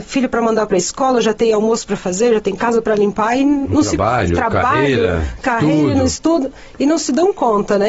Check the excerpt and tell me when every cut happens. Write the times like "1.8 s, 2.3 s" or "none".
none